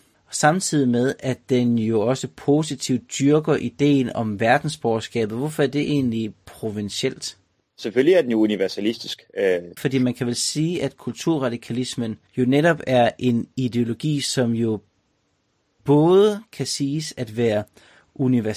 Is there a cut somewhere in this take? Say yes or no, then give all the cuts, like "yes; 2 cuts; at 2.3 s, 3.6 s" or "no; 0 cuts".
yes; 2 cuts; at 9.8 s, 12.3 s